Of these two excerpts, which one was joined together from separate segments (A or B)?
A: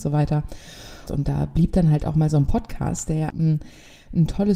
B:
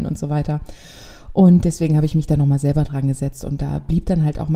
A